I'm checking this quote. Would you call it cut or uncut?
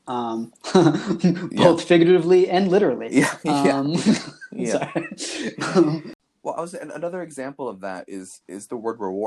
uncut